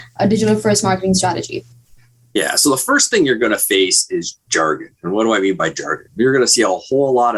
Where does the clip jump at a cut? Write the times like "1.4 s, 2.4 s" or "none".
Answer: none